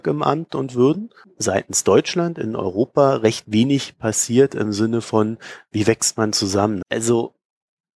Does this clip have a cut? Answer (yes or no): yes